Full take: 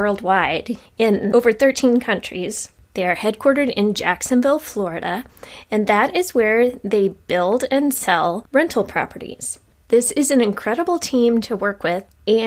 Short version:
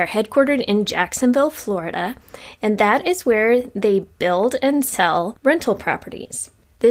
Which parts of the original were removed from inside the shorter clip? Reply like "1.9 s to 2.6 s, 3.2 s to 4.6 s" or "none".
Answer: none